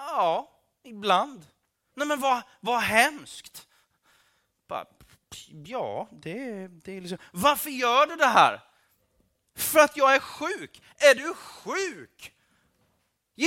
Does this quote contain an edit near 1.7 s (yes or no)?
yes